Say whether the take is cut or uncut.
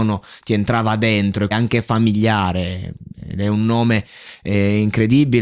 cut